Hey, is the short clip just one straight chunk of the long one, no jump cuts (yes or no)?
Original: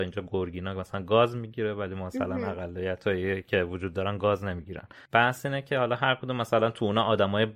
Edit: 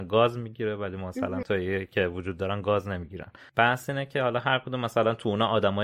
no